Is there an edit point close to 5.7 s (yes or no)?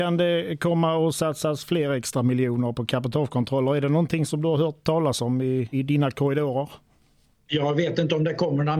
yes